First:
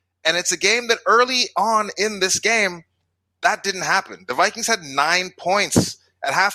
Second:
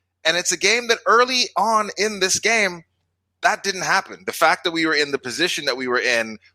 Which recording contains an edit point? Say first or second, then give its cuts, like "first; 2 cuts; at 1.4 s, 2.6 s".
second; 1 cut; at 4.3 s